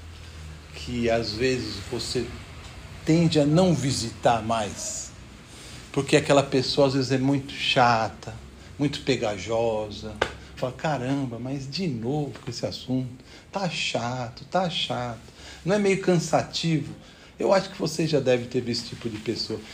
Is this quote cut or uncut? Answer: cut